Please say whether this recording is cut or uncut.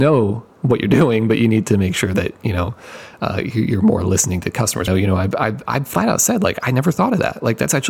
cut